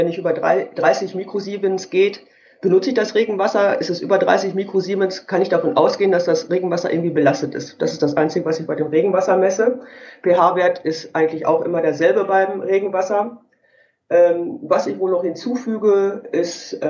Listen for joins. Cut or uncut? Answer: uncut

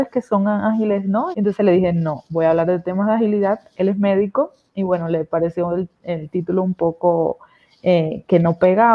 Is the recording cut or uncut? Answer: cut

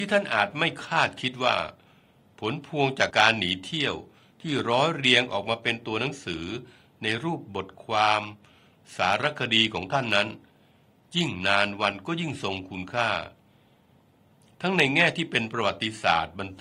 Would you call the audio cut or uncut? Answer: cut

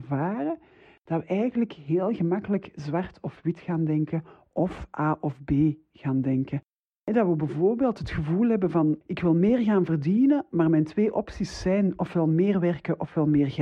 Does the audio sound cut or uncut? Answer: cut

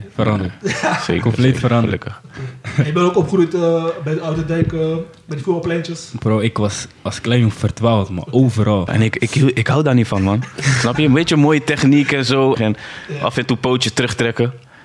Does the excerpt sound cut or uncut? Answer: cut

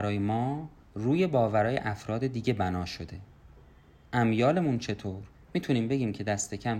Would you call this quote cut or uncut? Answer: cut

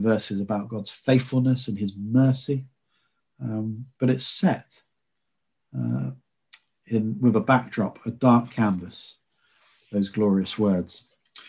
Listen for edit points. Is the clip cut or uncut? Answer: uncut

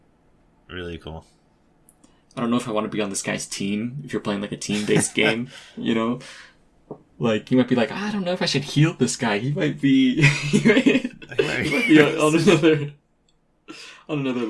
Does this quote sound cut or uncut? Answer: cut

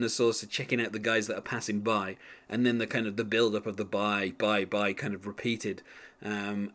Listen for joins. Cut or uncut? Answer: uncut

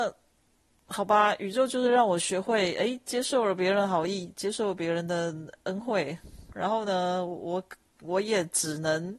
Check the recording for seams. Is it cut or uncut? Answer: uncut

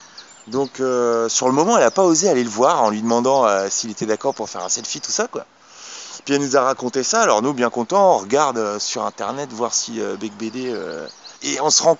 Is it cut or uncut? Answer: uncut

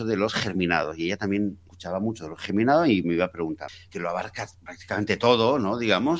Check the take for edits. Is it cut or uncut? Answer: cut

